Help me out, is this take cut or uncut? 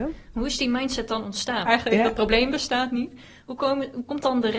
cut